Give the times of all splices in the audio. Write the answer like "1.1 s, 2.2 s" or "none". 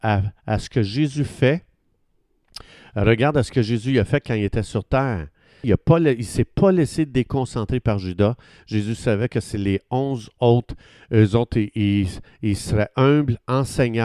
5.6 s